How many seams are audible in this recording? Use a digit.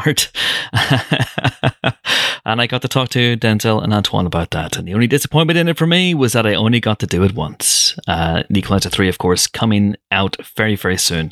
0